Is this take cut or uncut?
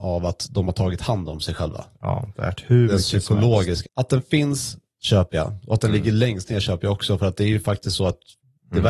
cut